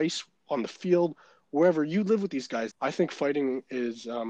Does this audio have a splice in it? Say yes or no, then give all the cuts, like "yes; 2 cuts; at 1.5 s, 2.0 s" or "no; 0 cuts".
yes; 1 cut; at 2.7 s